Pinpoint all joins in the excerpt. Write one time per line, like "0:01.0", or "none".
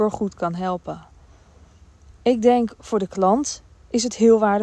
none